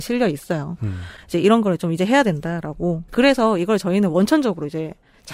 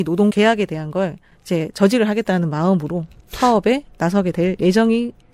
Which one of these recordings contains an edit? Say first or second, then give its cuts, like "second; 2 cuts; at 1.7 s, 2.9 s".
first; 1 cut; at 3.1 s